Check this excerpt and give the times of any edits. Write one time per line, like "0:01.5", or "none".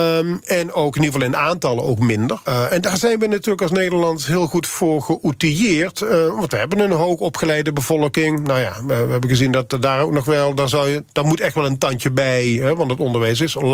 0:02.5